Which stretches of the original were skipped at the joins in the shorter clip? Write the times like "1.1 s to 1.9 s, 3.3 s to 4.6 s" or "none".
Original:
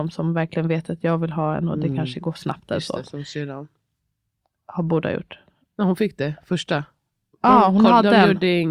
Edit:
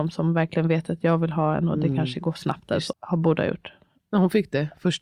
2.9 s to 4.6 s